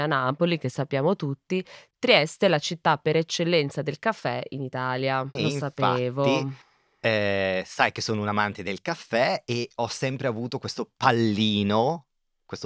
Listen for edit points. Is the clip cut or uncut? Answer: cut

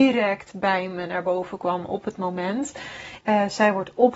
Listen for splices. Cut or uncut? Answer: cut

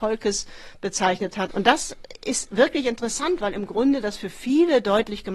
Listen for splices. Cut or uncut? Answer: cut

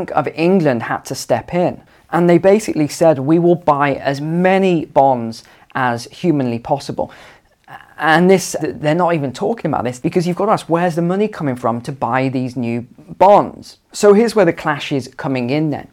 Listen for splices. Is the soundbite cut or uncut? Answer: cut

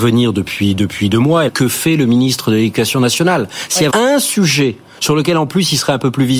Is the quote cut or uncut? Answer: cut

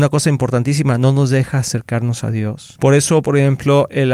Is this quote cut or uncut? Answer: cut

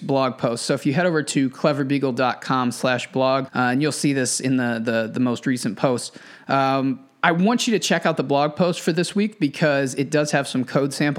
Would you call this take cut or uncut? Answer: cut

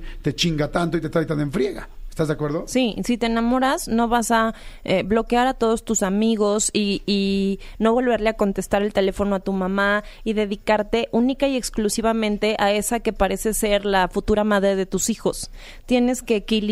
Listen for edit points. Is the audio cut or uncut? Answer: uncut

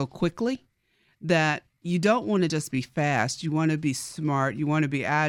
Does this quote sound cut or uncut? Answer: uncut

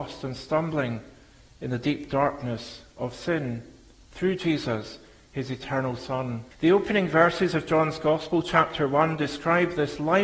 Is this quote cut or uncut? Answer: cut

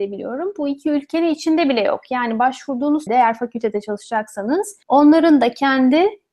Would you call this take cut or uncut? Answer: cut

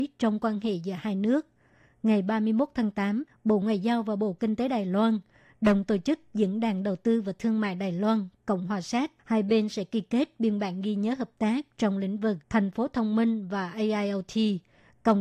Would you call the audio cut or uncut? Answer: cut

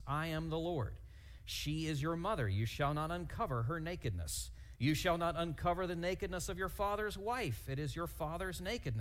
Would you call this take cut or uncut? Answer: cut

